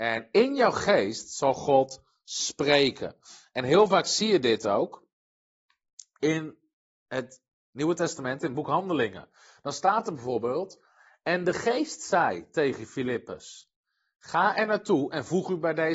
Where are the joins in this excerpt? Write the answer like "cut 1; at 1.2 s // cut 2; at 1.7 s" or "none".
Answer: none